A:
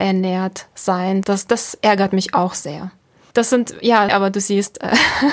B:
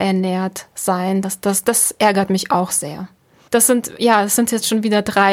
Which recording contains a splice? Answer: A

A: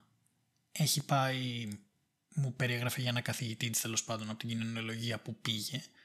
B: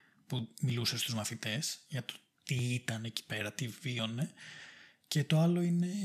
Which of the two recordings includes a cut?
B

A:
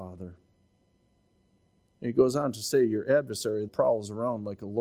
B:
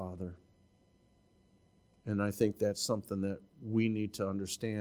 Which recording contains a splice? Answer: A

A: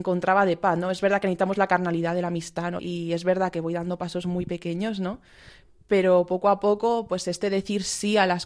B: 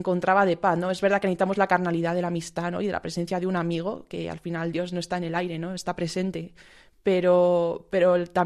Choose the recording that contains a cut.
A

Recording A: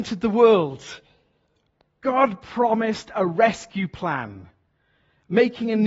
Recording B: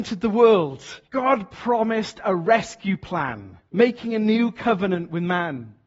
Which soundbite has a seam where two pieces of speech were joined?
B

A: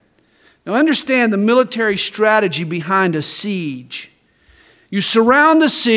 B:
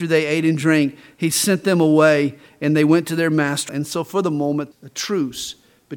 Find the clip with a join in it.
B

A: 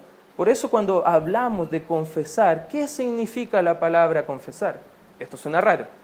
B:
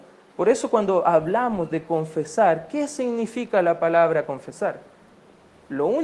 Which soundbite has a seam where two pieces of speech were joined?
A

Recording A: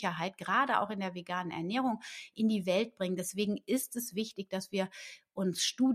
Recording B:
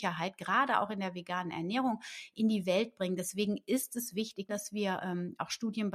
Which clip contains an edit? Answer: B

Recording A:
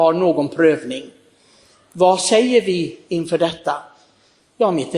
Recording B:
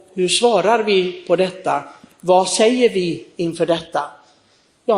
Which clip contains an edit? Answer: A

